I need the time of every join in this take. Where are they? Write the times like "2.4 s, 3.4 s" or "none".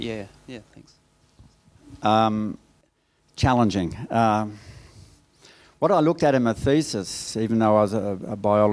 none